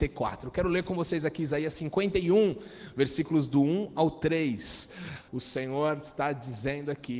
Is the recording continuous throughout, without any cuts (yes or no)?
no